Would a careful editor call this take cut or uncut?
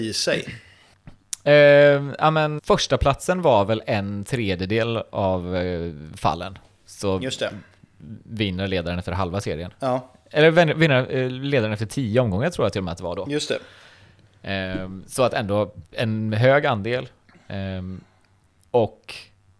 cut